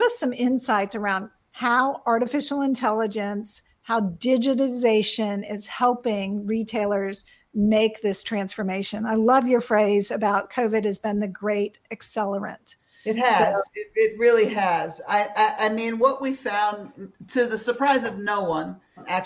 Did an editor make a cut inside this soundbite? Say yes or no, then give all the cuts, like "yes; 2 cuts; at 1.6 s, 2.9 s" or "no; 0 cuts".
no; 0 cuts